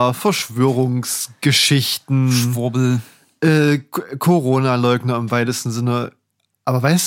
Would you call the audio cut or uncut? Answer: uncut